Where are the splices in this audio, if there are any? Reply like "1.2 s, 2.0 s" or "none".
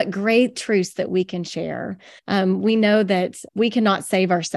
2.2 s, 3.5 s